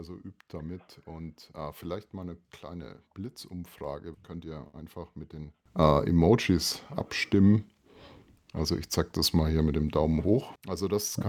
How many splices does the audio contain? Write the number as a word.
one